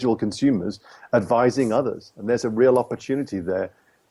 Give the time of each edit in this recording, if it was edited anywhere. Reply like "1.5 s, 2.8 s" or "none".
none